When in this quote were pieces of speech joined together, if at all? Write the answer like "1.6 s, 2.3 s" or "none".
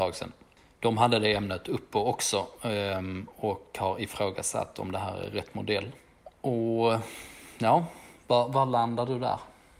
none